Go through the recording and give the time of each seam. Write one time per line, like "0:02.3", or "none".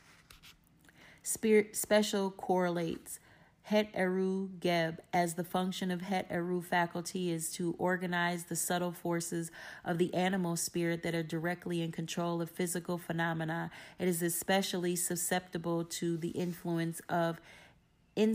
none